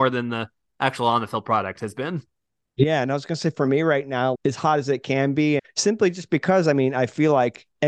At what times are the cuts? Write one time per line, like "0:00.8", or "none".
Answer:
0:04.3
0:05.6